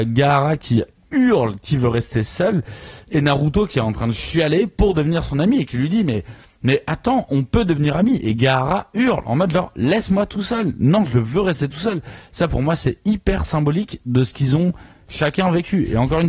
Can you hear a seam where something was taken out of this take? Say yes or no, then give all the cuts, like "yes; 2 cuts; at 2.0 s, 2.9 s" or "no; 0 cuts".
no; 0 cuts